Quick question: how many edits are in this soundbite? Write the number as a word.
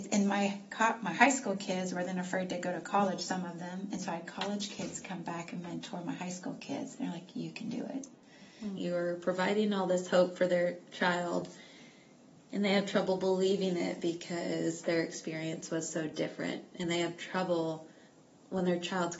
one